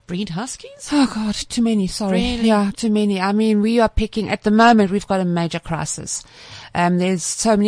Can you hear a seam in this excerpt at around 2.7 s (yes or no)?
yes